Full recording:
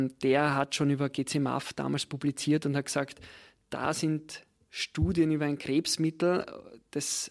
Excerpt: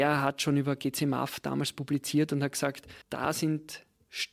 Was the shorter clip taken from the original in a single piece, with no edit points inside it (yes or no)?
no